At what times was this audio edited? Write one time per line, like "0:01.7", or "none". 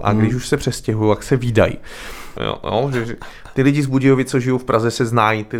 0:02.4